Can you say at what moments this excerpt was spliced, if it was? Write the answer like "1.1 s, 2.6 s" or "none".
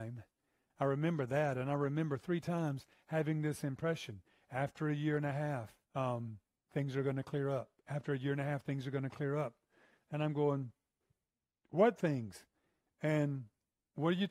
5.8 s